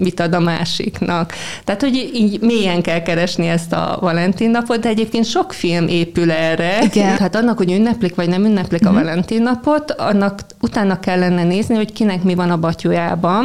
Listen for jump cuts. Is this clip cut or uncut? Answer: cut